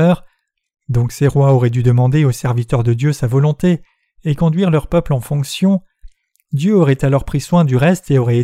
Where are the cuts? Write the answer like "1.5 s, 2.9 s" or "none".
none